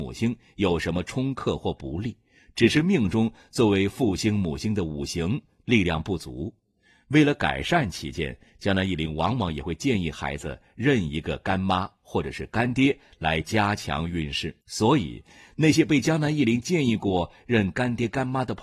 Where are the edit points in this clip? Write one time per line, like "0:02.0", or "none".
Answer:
0:14.6